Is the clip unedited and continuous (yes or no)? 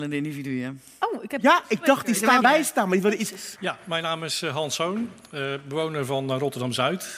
no